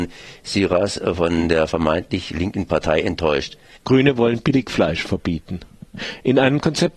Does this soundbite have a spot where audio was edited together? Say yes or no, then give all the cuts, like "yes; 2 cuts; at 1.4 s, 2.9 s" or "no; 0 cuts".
yes; 1 cut; at 3.8 s